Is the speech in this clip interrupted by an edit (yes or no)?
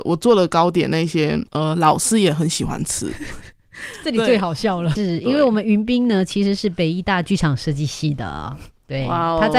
yes